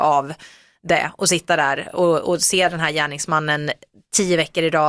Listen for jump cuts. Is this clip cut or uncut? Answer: uncut